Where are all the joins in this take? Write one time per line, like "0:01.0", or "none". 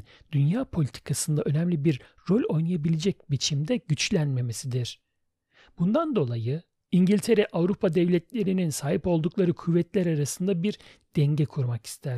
none